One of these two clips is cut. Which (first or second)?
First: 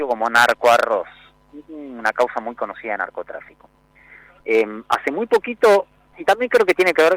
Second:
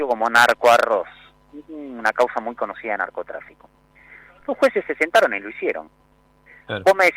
first